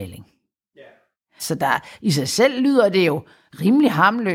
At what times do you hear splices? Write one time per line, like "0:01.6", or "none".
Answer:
0:01.4